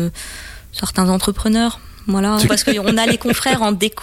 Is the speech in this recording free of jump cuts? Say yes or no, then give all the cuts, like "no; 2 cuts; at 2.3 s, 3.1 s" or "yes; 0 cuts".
no; 1 cut; at 2.5 s